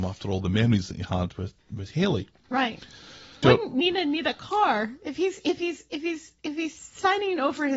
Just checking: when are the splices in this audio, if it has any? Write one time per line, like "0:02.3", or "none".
0:01.6
0:03.4